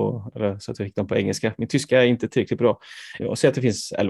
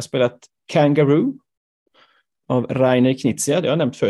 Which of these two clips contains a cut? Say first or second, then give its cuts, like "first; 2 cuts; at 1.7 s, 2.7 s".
first; 1 cut; at 3.2 s